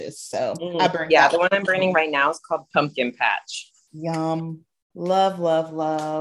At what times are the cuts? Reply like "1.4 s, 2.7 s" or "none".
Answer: none